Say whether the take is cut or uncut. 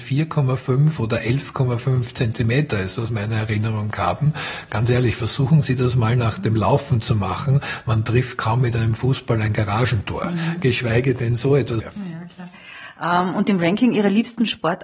cut